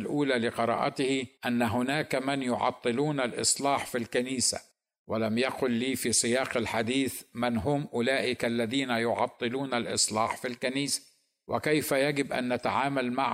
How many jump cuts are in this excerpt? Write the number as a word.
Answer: one